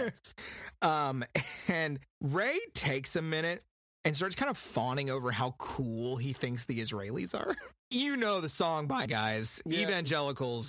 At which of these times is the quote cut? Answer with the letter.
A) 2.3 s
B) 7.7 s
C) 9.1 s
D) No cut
C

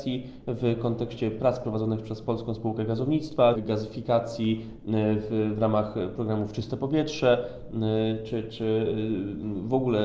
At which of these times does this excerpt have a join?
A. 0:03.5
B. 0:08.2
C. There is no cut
A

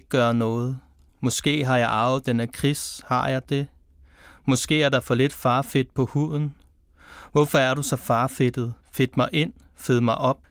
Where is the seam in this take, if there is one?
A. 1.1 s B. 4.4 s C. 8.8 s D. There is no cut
C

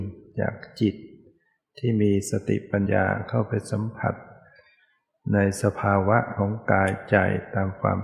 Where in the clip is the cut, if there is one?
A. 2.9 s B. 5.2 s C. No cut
A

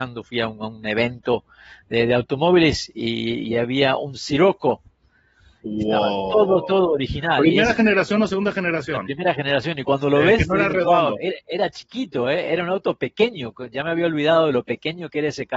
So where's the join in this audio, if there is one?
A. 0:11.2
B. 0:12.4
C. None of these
C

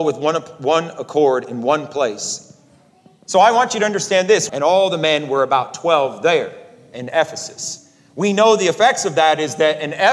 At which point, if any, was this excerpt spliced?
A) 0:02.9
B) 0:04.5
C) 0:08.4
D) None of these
B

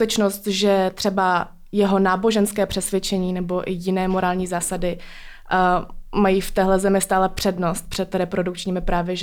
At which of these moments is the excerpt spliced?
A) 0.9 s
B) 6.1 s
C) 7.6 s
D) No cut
D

